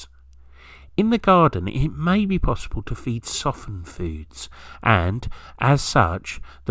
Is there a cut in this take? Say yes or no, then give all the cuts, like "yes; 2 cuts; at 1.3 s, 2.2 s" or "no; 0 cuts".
no; 0 cuts